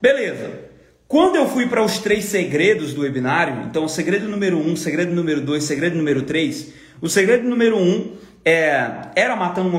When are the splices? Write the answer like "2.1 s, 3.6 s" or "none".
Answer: none